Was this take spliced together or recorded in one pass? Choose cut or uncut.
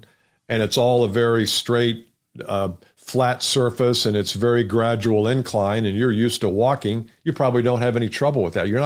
uncut